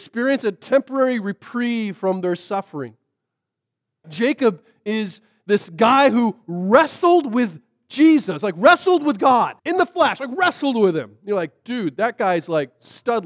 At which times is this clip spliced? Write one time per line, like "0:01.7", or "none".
0:04.0
0:09.6